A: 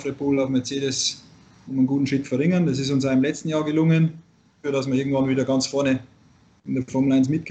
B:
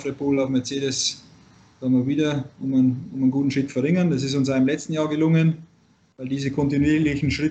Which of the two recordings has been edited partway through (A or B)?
A